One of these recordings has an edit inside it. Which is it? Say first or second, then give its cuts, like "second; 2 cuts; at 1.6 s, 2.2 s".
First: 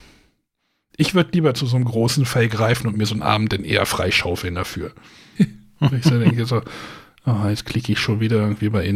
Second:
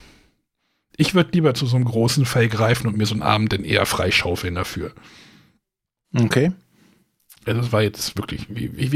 first; 1 cut; at 5.4 s